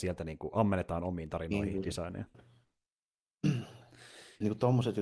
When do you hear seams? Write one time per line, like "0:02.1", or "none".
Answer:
0:02.3